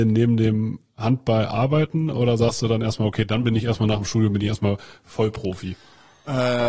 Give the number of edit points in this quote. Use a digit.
0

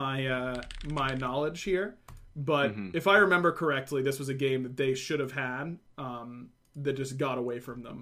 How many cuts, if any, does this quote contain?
0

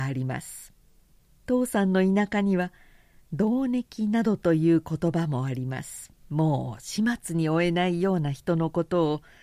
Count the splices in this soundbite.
2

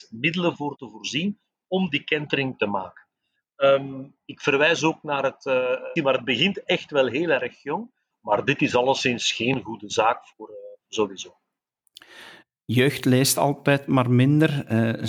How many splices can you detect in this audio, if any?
3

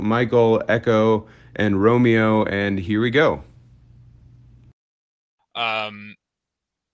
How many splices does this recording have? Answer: 1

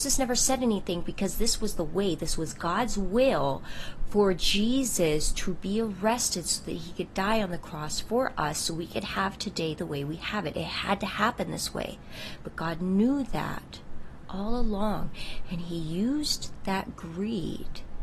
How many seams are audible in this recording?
0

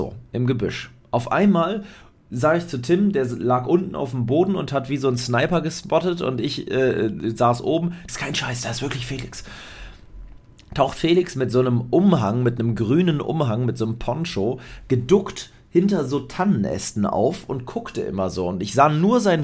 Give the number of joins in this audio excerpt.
1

